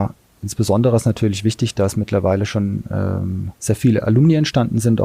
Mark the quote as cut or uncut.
cut